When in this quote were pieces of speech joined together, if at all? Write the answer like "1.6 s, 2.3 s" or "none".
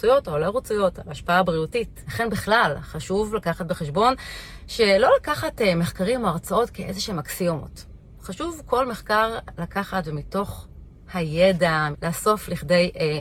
2.0 s, 11.9 s